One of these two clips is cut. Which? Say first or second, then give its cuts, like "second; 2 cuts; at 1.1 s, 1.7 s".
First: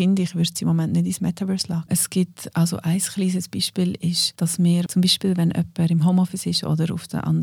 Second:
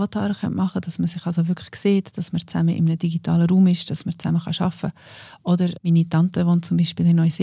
first; 2 cuts; at 1.9 s, 4.9 s